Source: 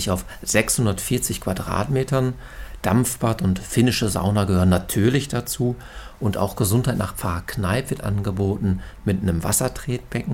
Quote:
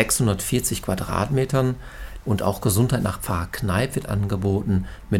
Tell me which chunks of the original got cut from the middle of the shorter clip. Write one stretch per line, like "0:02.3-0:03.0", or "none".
0:02.8-0:06.2